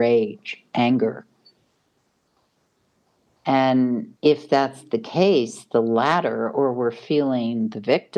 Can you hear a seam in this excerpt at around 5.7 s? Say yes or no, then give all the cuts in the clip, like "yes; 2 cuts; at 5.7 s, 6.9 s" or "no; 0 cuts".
no; 1 cut; at 4.2 s